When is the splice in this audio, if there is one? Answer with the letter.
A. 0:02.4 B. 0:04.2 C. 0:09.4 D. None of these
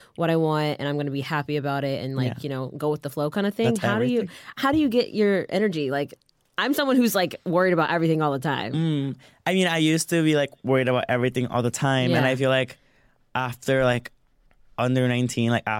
D